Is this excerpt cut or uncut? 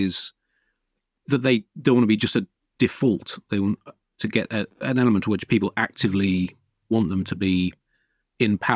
uncut